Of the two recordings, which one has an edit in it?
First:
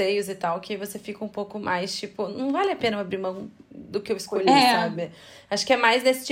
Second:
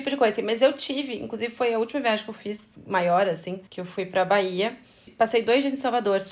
second; 2 cuts; at 3.7 s, 5.1 s

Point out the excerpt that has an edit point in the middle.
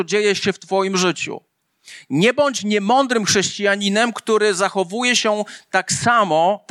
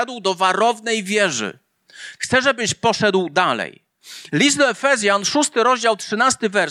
second; 1 cut; at 2.2 s

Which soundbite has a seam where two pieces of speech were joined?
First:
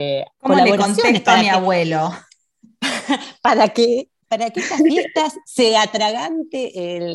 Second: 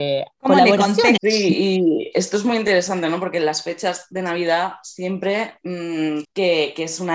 second; 2 cuts; at 1.2 s, 6.2 s

